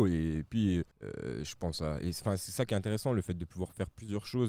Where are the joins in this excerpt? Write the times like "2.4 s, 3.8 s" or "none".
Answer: 0.9 s